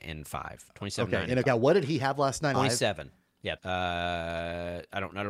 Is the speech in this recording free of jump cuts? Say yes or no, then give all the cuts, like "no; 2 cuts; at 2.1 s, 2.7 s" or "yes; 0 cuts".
no; 3 cuts; at 1.5 s, 2.5 s, 3.6 s